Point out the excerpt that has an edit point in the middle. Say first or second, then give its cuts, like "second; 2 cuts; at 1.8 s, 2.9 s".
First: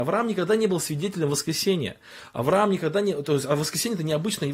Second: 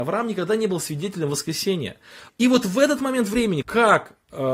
second; 2 cuts; at 2.3 s, 3.6 s